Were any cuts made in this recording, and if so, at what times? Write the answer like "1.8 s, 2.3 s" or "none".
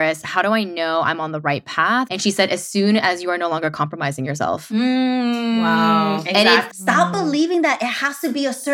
2.1 s, 6.7 s